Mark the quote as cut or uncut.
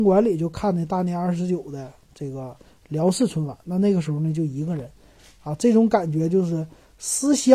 uncut